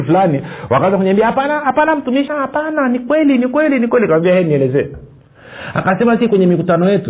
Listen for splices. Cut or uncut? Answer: cut